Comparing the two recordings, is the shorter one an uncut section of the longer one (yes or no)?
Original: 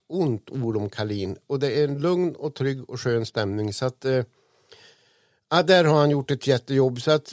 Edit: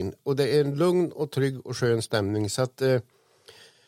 yes